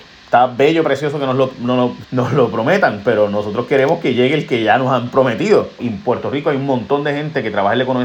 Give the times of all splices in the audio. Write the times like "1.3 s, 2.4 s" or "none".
2.0 s, 5.8 s